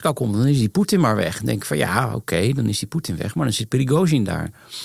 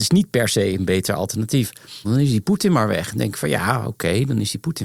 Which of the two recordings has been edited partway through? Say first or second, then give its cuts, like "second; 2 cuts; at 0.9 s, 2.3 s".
second; 1 cut; at 2.0 s